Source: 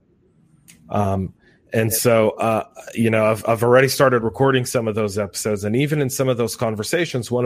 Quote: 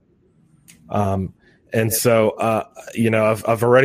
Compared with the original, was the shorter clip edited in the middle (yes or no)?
no